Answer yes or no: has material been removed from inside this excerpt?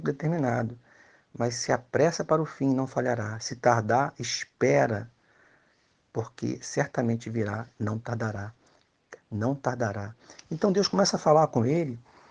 yes